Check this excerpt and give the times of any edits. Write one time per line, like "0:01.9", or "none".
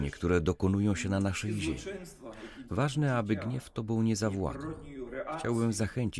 0:02.7